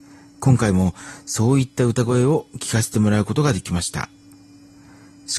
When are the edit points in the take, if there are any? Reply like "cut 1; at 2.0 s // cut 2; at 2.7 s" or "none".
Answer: none